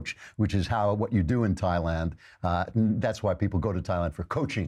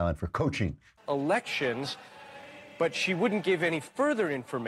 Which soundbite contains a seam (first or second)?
second